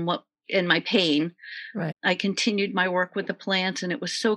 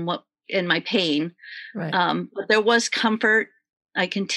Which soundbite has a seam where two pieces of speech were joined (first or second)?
first